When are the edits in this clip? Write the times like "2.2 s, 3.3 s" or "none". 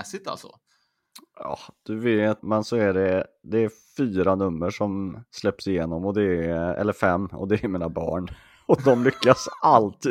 2.4 s